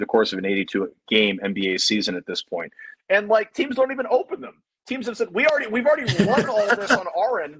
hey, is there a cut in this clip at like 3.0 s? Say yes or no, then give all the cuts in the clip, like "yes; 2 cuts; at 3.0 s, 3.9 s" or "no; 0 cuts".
yes; 1 cut; at 3.0 s